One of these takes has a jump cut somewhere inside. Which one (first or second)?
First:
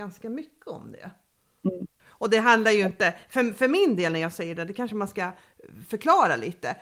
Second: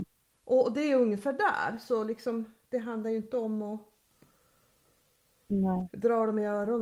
first